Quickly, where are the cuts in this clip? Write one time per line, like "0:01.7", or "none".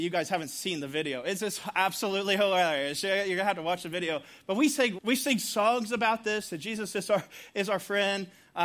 0:05.0